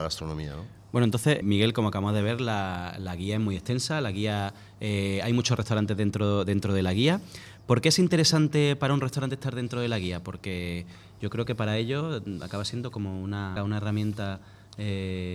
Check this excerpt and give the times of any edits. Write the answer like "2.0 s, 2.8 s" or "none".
1.4 s, 13.6 s